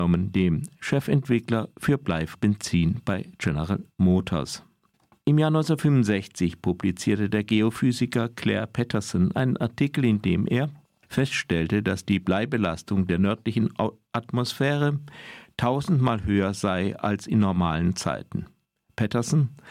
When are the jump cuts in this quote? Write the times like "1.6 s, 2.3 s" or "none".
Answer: none

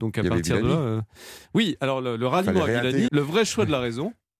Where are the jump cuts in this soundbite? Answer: 3.1 s

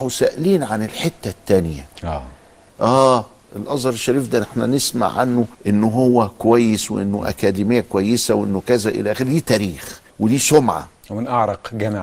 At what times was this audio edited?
2.7 s, 5.5 s, 10.1 s

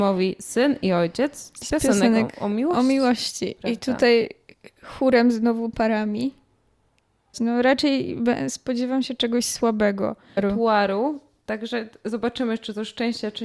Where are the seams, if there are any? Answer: 7.3 s, 10.4 s

